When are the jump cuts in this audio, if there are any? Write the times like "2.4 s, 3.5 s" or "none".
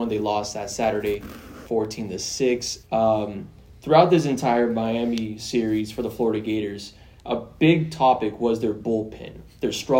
2.8 s